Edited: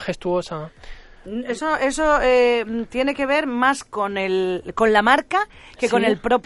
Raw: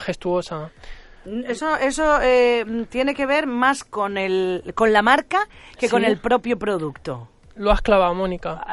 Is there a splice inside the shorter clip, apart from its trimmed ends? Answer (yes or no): no